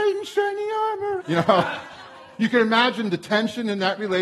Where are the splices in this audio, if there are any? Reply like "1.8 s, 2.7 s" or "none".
1.2 s